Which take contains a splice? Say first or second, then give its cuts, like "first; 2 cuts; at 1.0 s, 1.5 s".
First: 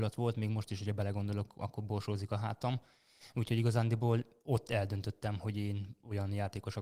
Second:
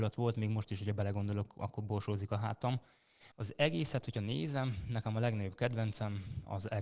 second; 1 cut; at 3.3 s